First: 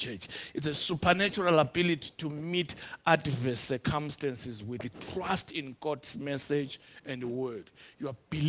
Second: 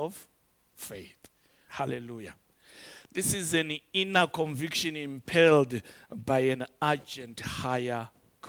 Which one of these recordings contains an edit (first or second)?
second